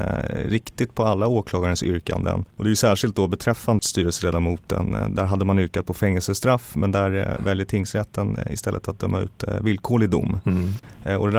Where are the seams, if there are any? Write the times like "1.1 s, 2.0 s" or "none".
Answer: 3.8 s